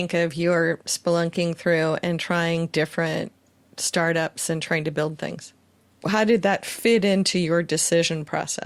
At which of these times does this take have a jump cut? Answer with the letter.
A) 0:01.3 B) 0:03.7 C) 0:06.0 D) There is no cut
C